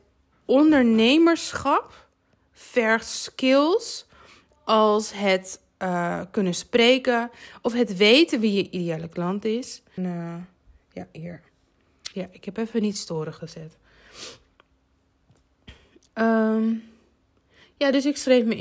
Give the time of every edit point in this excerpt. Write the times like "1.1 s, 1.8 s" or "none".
10.0 s, 12.1 s